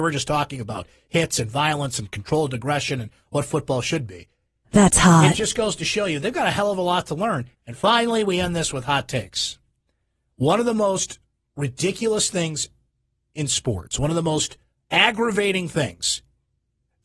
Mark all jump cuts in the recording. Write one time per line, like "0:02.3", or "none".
0:07.5